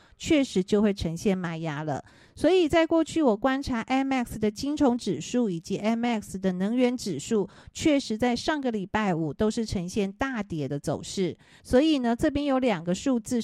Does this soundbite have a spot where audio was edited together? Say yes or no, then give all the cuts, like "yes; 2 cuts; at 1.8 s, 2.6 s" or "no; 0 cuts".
yes; 1 cut; at 11.6 s